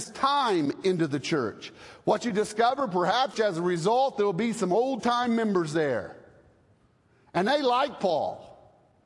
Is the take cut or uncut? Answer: cut